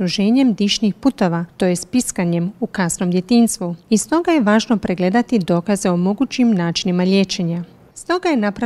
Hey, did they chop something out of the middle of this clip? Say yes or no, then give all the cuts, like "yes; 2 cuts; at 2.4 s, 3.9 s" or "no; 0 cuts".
no; 0 cuts